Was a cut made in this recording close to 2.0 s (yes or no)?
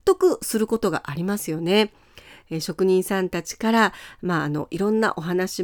no